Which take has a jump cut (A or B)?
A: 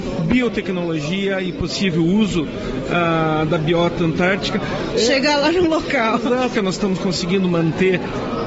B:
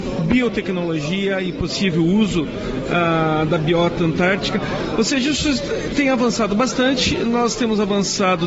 A